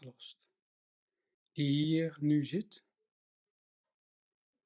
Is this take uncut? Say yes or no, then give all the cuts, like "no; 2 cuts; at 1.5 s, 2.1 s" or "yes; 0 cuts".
no; 1 cut; at 1.3 s